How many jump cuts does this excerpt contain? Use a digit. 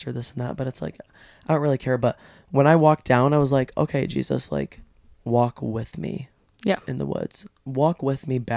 0